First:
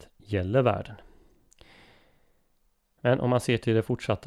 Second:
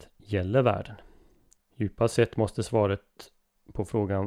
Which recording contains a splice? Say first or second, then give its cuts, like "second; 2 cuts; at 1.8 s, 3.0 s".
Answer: second; 1 cut; at 1.5 s